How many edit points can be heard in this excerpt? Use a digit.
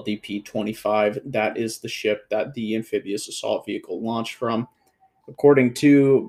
1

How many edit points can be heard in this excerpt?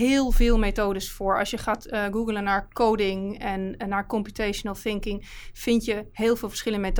0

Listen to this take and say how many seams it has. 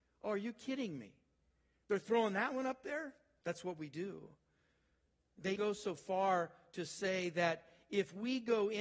2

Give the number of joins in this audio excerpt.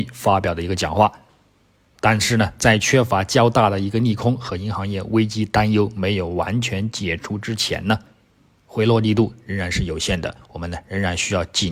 1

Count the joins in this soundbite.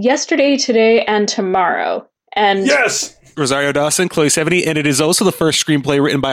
1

